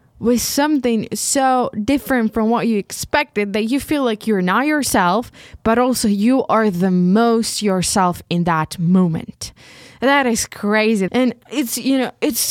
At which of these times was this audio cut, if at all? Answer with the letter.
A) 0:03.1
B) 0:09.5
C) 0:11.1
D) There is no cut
C